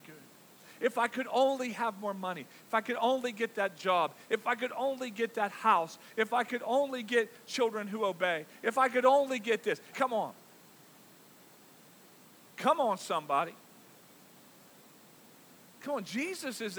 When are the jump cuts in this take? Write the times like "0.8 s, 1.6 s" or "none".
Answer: 9.9 s